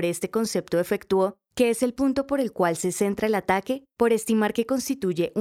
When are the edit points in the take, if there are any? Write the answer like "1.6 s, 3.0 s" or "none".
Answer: none